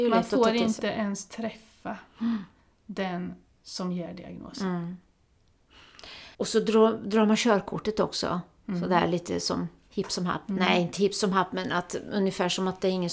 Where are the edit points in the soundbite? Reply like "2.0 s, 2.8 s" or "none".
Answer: 6.3 s